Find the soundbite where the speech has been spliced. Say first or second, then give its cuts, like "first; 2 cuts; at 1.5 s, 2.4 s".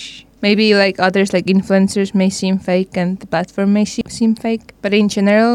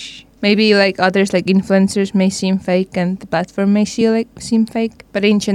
first; 1 cut; at 4.0 s